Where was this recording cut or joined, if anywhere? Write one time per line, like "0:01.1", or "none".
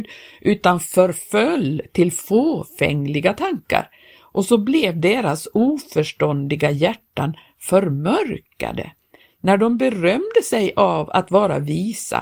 none